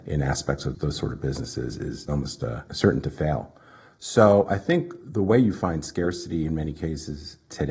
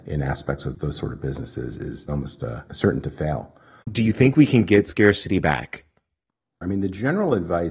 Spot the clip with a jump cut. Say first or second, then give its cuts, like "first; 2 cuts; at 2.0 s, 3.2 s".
second; 2 cuts; at 3.8 s, 6.6 s